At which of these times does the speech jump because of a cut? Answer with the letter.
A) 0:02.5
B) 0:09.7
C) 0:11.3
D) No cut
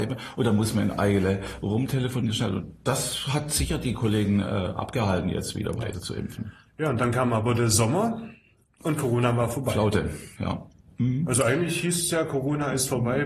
D